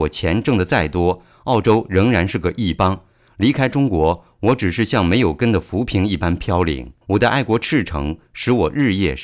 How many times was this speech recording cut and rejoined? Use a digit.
1